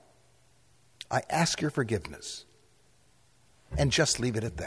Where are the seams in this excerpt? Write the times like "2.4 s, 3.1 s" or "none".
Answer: 1.0 s